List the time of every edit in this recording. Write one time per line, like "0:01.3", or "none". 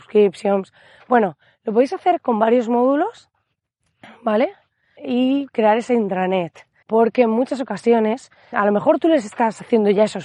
0:05.0
0:06.8
0:08.5

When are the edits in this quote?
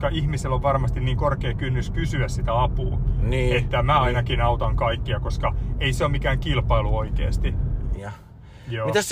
0:08.0

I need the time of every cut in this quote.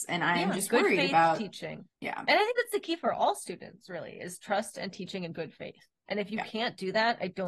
0:01.9

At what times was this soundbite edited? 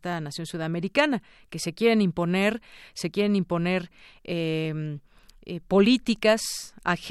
none

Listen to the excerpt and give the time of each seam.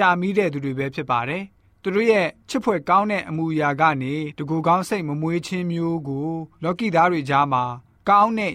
0:06.5

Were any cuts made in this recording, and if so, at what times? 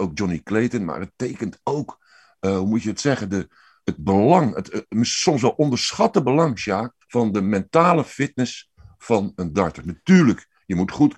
0:07.0

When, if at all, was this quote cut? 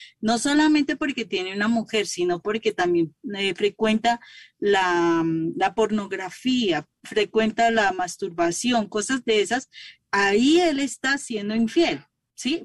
none

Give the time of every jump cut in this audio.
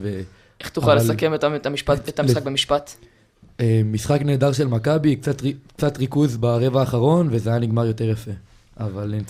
none

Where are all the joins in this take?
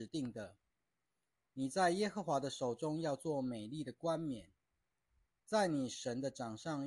none

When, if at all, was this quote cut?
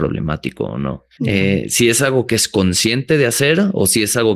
0:01.2

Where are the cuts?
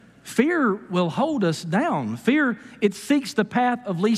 none

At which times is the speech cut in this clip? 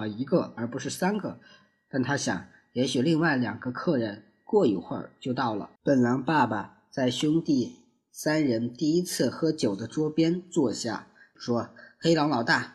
0:05.8
0:11.3

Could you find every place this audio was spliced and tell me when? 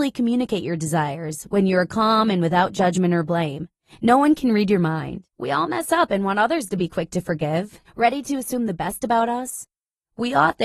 0:05.3
0:07.8

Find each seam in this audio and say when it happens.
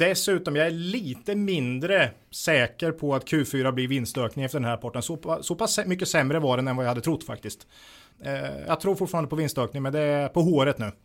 0:08.1

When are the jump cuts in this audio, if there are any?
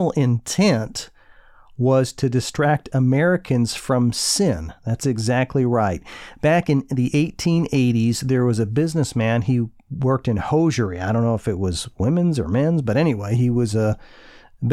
none

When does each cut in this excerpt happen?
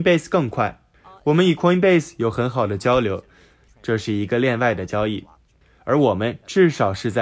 0:03.7

